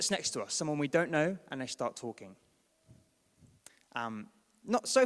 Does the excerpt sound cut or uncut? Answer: uncut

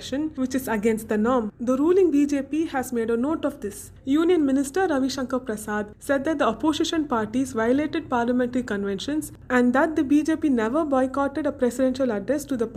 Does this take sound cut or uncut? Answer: uncut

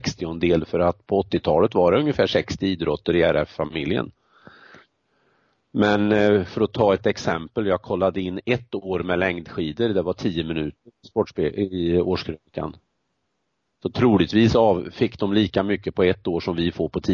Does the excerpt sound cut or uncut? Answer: uncut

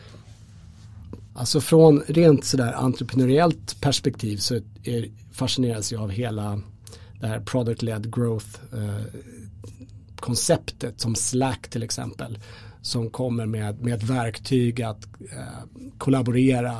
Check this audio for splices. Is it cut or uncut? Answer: cut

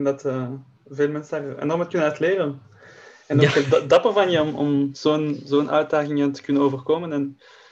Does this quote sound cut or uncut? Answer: uncut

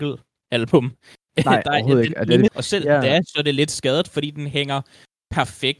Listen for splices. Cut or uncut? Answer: cut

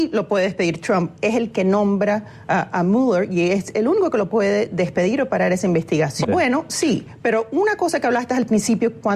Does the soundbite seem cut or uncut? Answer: cut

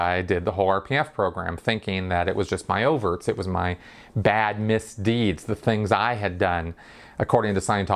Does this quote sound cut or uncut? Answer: uncut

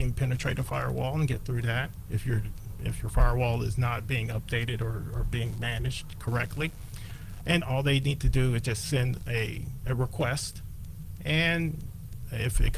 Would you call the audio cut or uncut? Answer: cut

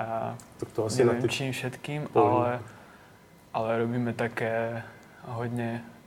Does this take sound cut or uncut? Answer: uncut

